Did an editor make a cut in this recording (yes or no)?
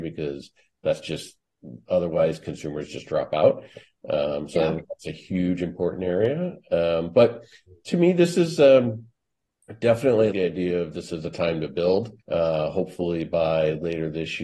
yes